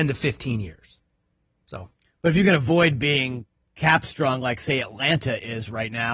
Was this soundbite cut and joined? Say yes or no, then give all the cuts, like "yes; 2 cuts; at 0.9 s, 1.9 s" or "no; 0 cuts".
no; 0 cuts